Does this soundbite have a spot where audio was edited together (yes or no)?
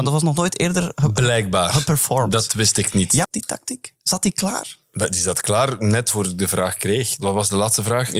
yes